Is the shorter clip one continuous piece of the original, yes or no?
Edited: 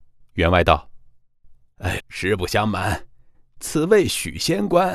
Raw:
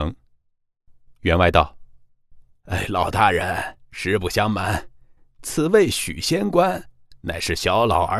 no